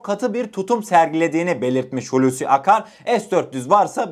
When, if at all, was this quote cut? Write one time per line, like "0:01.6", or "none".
none